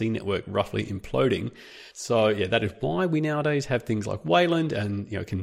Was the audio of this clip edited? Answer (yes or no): yes